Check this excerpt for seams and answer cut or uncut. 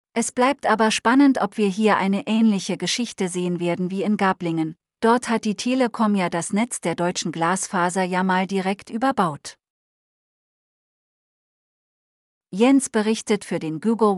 uncut